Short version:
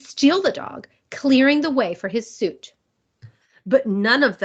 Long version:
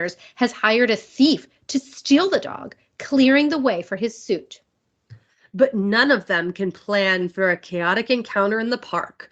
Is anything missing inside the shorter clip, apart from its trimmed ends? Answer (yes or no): no